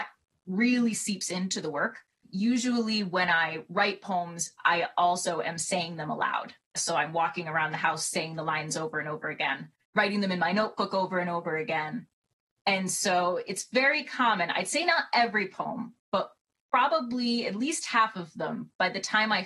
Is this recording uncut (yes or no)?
yes